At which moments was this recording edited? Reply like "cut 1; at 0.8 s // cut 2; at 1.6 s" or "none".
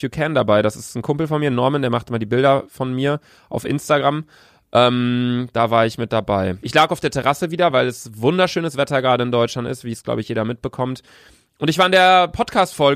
cut 1; at 6.6 s